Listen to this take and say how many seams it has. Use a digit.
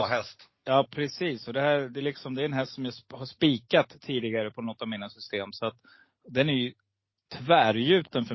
0